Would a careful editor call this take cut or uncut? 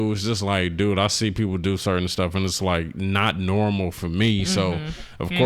uncut